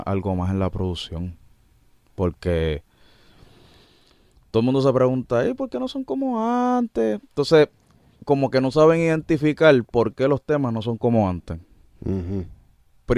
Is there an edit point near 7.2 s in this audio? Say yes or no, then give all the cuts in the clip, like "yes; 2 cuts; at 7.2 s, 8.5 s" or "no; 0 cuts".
no; 0 cuts